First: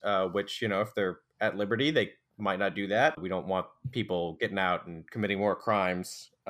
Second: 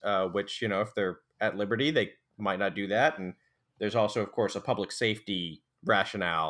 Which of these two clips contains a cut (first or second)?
first